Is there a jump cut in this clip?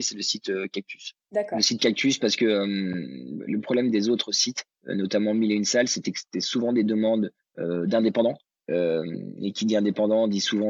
no; 0 cuts

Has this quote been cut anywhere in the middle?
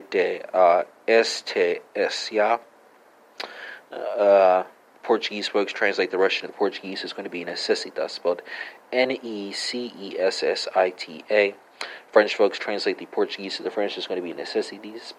no; 0 cuts

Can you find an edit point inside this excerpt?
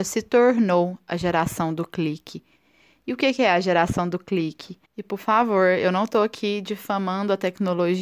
yes; 1 cut; at 4.8 s

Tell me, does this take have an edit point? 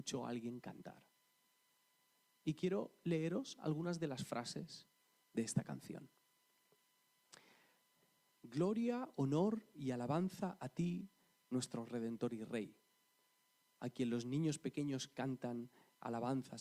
no; 0 cuts

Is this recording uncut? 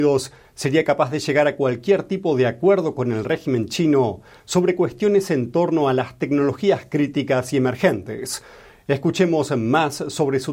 yes; 0 cuts

